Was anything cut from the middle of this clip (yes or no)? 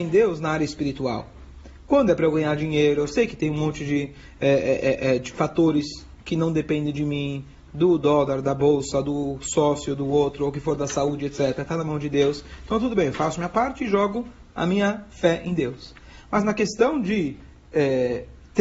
no